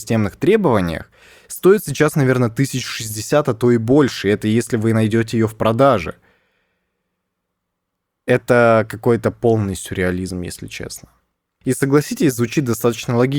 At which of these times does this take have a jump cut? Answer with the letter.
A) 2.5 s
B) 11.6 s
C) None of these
B